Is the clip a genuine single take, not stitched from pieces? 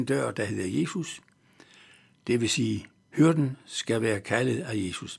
yes; 0 cuts

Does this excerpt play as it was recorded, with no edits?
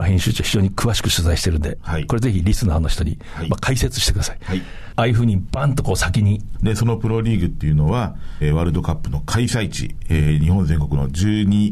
no; 2 cuts; at 4.9 s, 6.6 s

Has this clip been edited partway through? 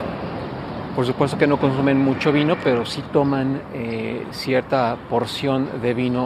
no; 0 cuts

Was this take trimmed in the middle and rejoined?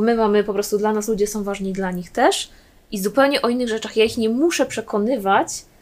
no; 0 cuts

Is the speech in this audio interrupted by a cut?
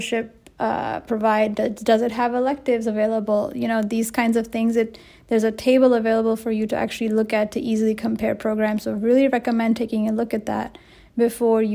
no; 0 cuts

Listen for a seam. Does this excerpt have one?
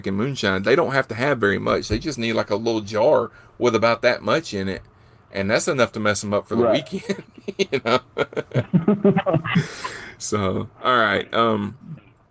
no; 0 cuts

